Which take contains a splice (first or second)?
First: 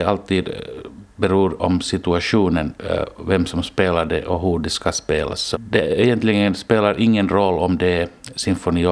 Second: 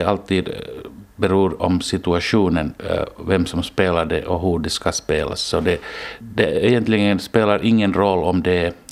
first